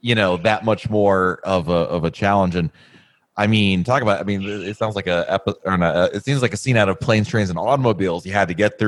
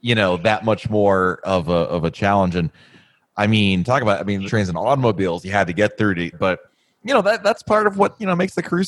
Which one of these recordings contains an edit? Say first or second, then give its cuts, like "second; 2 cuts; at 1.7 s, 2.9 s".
second; 2 cuts; at 4.5 s, 6.3 s